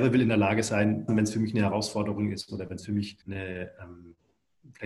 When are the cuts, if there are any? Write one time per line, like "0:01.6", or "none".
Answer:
0:01.1
0:03.2